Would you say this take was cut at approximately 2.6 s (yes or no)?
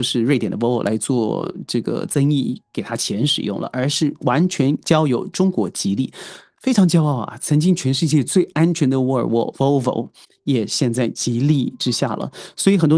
no